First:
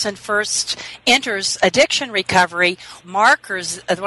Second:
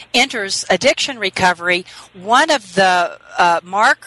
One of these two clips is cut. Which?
first; 1 cut; at 3.0 s

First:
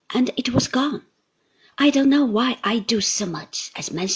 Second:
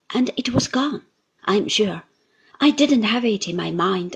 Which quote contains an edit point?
second; 1 cut; at 1.4 s

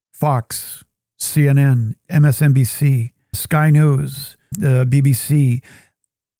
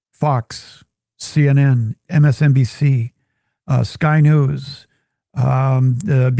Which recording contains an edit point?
first; 2 cuts; at 3.3 s, 4.5 s

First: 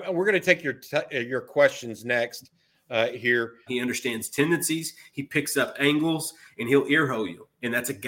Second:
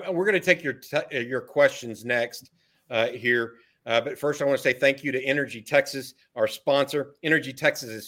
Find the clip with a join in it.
first; 1 cut; at 3.7 s

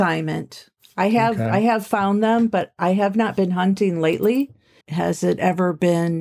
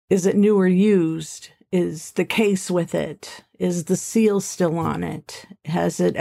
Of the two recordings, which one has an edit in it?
first; 1 cut; at 4.8 s

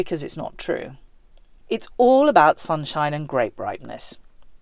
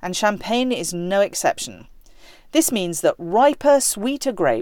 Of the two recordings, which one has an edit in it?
first; 1 cut; at 1.6 s

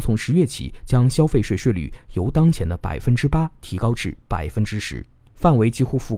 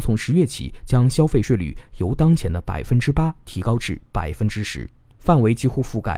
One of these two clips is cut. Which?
second; 1 cut; at 1.4 s

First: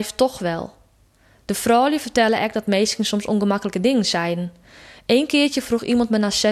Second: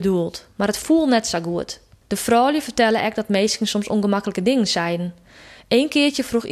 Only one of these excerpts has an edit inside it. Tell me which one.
second; 1 cut; at 2.0 s

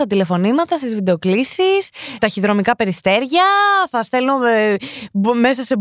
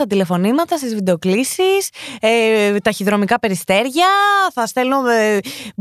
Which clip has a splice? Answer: first; 1 cut; at 2.2 s

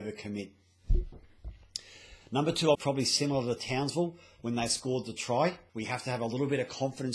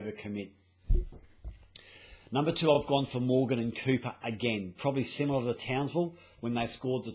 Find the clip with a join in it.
first; 2 cuts; at 2.7 s, 5.7 s

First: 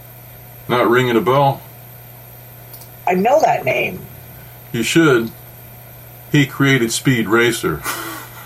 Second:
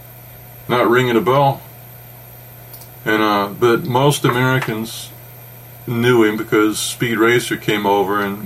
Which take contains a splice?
second; 1 cut; at 2.9 s

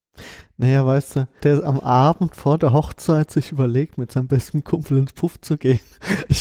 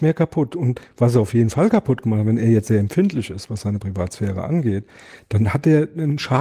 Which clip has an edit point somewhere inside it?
first; 1 cut; at 1.4 s

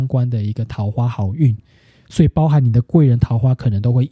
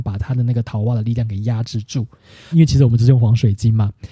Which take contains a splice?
second; 1 cut; at 2.5 s

